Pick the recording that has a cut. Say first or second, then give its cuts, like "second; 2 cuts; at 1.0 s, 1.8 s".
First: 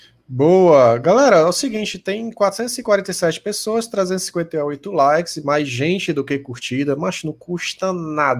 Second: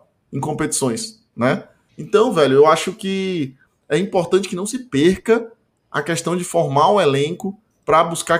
second; 1 cut; at 1.9 s